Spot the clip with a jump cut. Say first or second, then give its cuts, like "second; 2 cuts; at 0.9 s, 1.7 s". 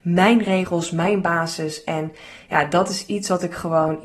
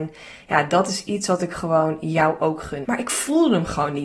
second; 1 cut; at 2.8 s